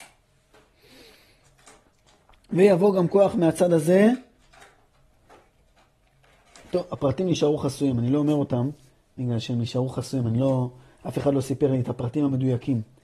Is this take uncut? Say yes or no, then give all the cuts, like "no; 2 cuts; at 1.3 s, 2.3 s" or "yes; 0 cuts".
yes; 0 cuts